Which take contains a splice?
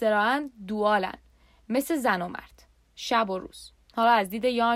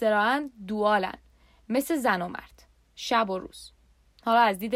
first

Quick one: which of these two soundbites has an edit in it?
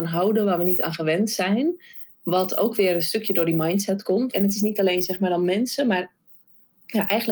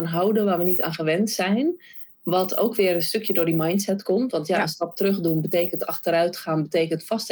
first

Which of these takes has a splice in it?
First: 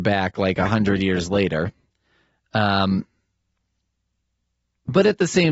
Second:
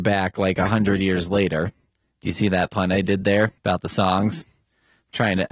second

